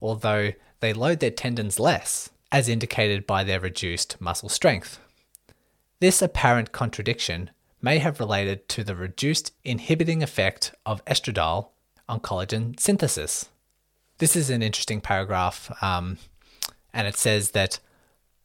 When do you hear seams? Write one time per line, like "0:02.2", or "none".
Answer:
0:14.2